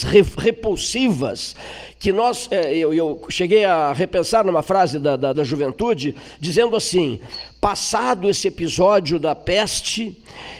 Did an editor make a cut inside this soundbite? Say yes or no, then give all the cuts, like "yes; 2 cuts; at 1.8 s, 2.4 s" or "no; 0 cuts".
yes; 1 cut; at 5.3 s